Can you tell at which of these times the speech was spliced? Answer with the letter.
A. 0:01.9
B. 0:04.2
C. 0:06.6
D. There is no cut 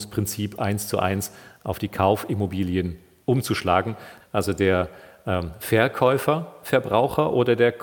B